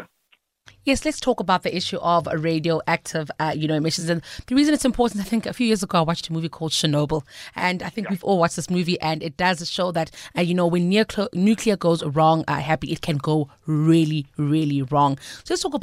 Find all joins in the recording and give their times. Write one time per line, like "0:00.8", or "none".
none